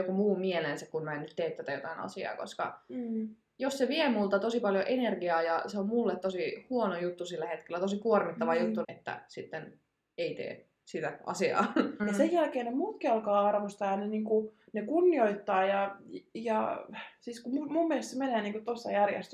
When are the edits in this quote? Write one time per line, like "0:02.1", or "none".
0:08.8
0:12.0